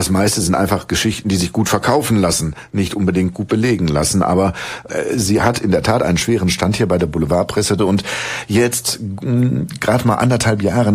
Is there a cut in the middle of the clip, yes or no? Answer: yes